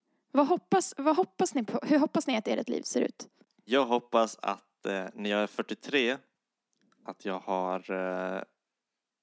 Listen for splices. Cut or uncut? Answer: uncut